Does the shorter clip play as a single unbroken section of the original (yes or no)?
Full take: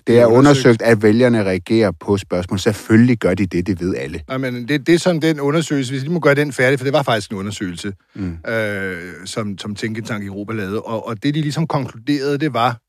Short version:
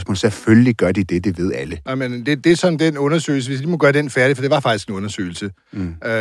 yes